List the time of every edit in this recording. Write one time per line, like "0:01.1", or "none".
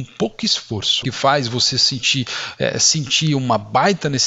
0:01.0